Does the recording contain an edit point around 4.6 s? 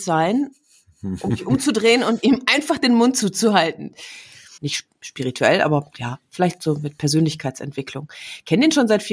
yes; 1 cut; at 4.6 s

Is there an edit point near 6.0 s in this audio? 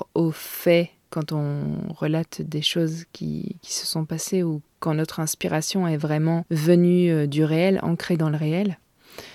no; 0 cuts

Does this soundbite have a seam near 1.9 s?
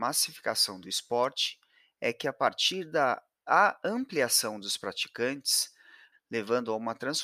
no; 1 cut; at 6.1 s

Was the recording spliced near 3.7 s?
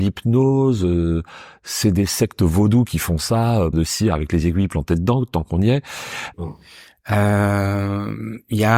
yes; 2 cuts; at 3.7 s, 6.3 s

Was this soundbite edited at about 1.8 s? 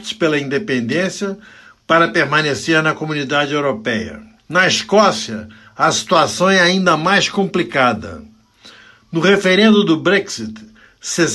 no; 1 cut; at 4.4 s

